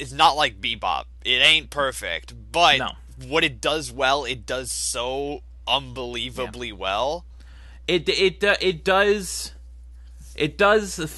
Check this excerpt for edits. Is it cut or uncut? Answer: uncut